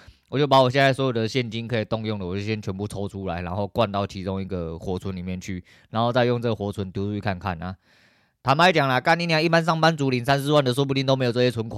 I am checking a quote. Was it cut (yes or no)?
no